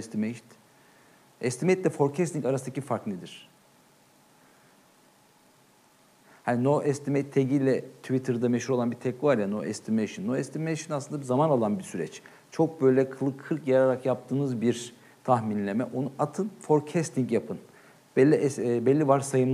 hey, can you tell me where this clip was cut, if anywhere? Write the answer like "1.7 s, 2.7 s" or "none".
none